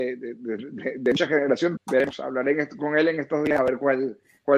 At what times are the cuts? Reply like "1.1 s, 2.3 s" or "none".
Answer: 1.8 s